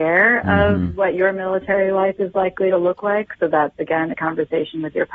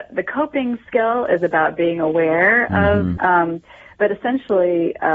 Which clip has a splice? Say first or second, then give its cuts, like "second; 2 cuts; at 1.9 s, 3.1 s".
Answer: second; 1 cut; at 3.2 s